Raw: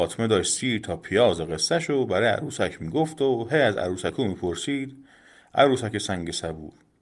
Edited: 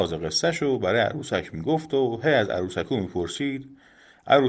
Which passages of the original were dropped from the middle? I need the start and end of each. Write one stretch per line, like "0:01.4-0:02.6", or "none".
none